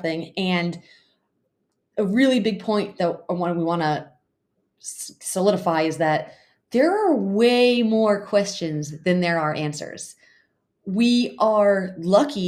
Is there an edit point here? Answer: no; 0 cuts

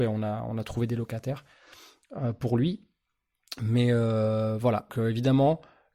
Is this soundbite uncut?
no; 1 cut; at 4.9 s

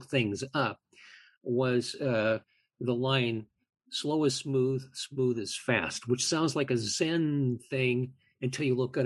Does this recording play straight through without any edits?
yes; 0 cuts

